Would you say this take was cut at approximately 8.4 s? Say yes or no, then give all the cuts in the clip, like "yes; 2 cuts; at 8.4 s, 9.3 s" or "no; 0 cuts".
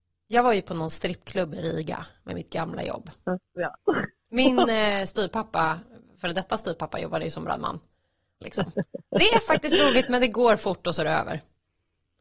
yes; 2 cuts; at 3.6 s, 8.4 s